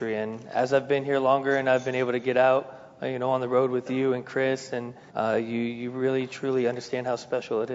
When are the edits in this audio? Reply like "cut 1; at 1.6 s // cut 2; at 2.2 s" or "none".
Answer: cut 1; at 5.1 s

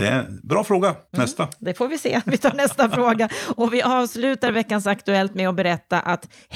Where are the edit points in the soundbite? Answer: cut 1; at 1.1 s

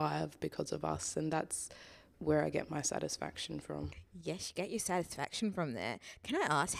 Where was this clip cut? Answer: cut 1; at 2.1 s

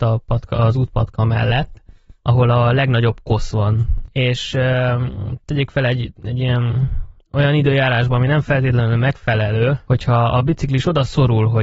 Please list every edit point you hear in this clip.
none

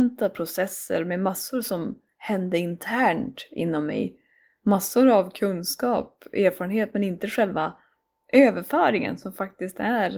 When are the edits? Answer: none

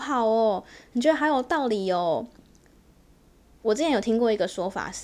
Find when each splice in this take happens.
none

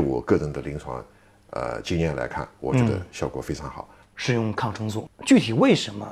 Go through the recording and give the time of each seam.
cut 1; at 4.0 s

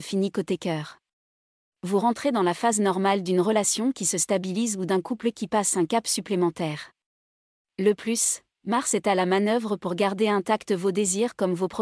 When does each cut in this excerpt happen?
none

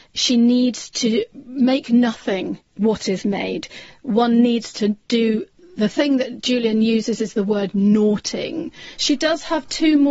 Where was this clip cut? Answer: cut 1; at 2.7 s // cut 2; at 9.0 s

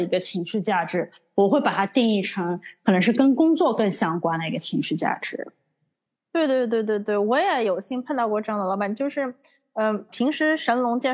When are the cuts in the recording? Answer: cut 1; at 10.1 s

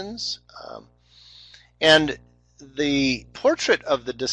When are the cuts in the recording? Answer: none

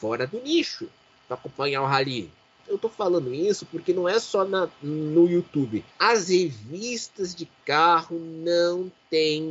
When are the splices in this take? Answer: cut 1; at 2.6 s // cut 2; at 5.9 s

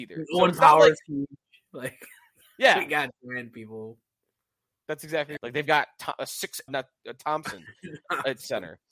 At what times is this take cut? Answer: cut 1; at 5.4 s // cut 2; at 6.7 s

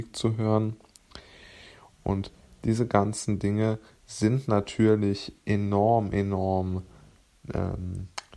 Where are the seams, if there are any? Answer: none

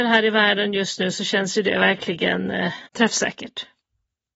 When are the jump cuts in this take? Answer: cut 1; at 2.9 s

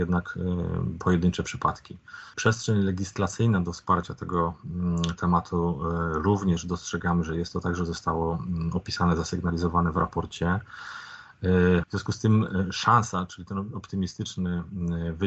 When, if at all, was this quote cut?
cut 1; at 2.3 s // cut 2; at 11.8 s

